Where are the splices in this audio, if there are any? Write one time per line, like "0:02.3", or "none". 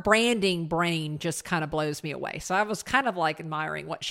none